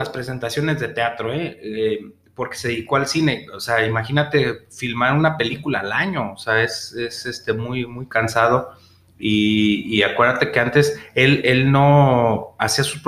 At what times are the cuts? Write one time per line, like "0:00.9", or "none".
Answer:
none